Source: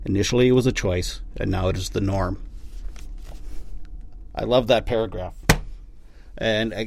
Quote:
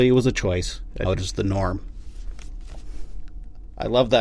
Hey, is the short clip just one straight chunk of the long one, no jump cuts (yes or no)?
no